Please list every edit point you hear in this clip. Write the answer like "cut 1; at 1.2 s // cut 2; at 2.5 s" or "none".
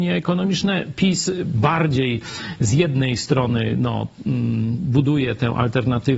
none